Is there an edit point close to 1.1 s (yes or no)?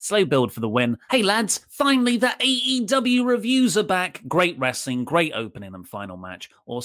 yes